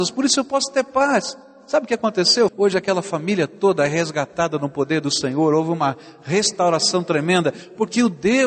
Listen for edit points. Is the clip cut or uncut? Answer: cut